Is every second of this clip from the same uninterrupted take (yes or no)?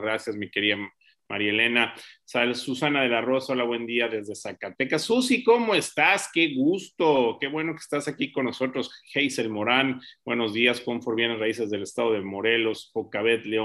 yes